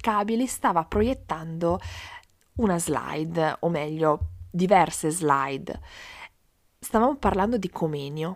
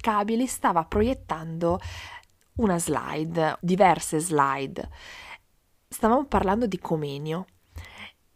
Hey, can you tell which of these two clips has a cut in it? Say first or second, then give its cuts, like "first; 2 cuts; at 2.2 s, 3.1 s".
second; 1 cut; at 3.6 s